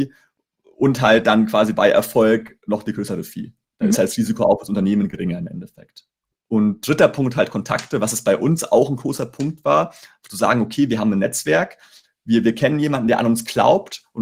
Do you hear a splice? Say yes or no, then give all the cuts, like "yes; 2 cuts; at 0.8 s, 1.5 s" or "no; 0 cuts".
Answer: yes; 1 cut; at 6.3 s